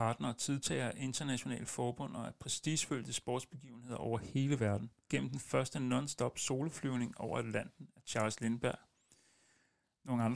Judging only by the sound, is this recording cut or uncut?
cut